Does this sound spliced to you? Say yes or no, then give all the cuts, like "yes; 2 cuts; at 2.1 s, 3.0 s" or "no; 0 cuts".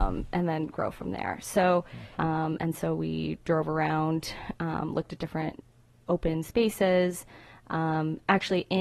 yes; 1 cut; at 2.2 s